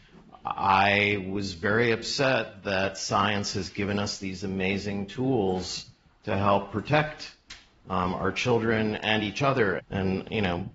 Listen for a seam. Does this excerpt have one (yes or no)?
yes